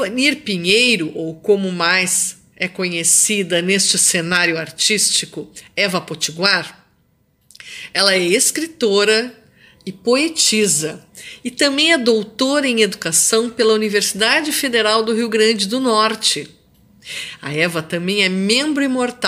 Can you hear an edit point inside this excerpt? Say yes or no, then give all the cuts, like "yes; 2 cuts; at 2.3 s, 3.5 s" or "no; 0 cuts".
no; 0 cuts